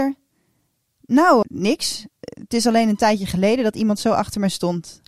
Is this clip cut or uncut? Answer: cut